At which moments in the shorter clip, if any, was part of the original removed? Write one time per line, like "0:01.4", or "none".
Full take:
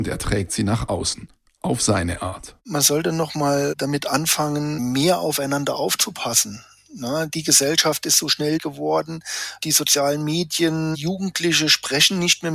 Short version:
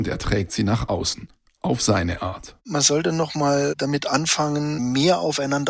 none

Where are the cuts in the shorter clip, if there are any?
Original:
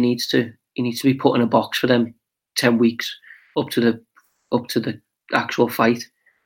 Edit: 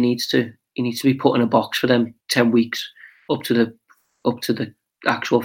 0:02.2

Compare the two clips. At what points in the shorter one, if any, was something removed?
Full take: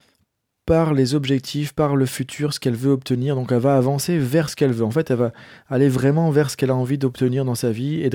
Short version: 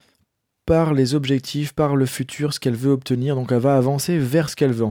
none

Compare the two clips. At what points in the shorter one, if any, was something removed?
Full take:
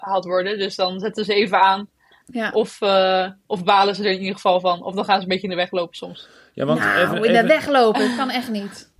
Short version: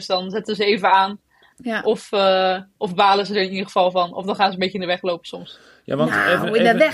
none

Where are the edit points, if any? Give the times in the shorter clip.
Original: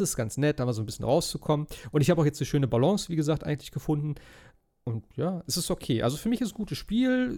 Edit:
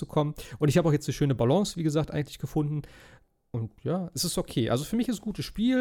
none

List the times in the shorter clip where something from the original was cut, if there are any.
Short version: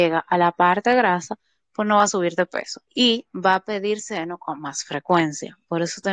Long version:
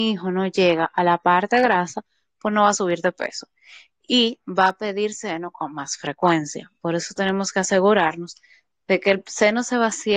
0:02.9

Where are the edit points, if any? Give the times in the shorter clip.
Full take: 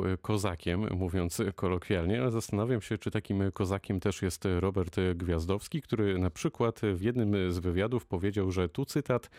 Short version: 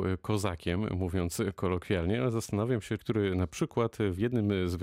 0:03.0

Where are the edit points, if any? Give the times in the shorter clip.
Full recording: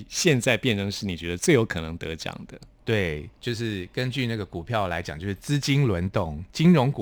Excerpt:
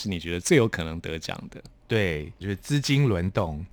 0:02.4

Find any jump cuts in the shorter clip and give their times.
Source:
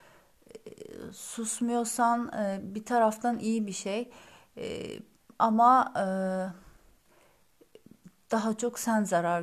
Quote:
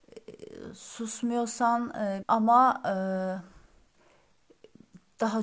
0:02.2

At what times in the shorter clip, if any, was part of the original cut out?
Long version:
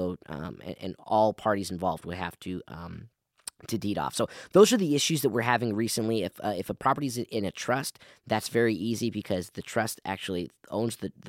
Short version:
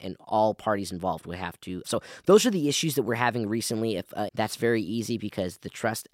0:01.8
0:04.3

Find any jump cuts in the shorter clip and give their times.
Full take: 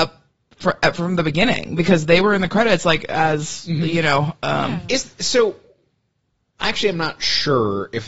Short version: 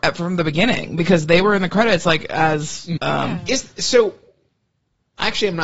0:03.0

